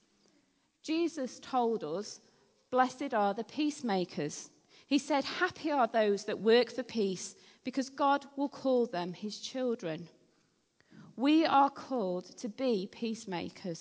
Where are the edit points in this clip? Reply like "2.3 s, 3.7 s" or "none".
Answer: none